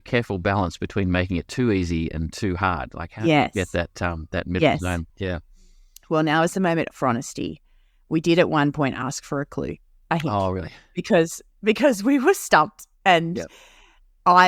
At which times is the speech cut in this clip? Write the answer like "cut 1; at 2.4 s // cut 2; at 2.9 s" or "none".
none